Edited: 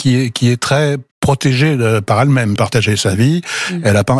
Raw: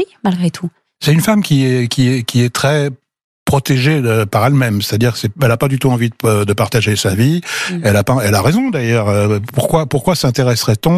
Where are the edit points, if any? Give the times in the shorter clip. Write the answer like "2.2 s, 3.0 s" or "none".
1.1 s, 2.6 s